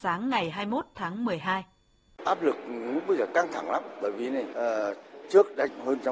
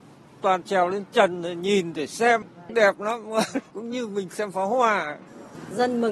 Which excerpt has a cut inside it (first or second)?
first